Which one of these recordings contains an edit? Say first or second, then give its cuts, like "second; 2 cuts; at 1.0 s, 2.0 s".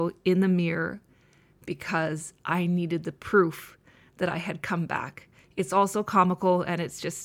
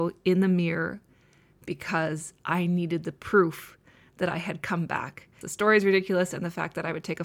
second; 1 cut; at 5.4 s